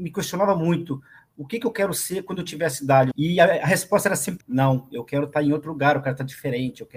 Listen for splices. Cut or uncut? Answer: cut